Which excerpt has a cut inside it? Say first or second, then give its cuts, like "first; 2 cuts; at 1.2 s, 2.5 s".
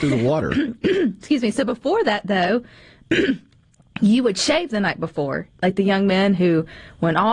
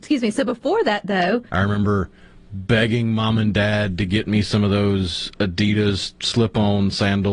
second; 1 cut; at 1.5 s